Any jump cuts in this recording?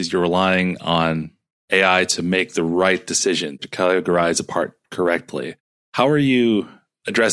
yes; 1 cut; at 3.6 s

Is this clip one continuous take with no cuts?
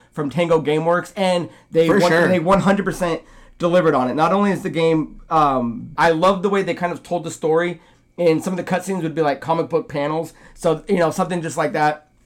no; 1 cut; at 5.9 s

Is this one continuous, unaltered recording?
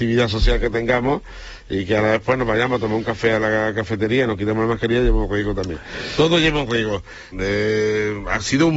no; 1 cut; at 7.3 s

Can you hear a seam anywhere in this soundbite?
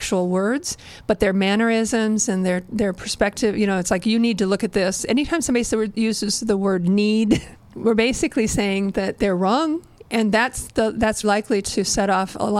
yes; 2 cuts; at 7.6 s, 11.2 s

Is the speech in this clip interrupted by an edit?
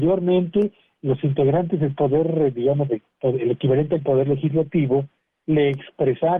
no; 0 cuts

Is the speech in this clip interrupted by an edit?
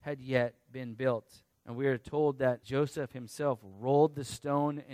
yes; 2 cuts; at 1.5 s, 2.6 s

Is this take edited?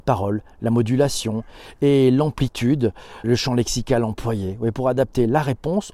yes; 1 cut; at 3.2 s

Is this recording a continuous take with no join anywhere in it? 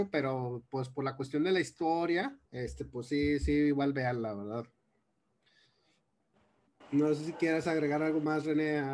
no; 2 cuts; at 2.5 s, 6.8 s

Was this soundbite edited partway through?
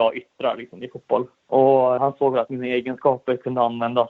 yes; 1 cut; at 2.0 s

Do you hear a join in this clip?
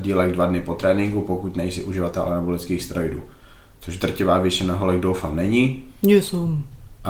no; 0 cuts

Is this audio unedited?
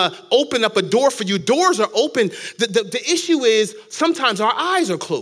yes; 0 cuts

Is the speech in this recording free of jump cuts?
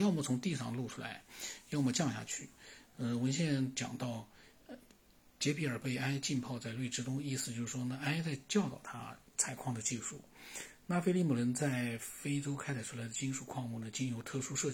yes; 0 cuts

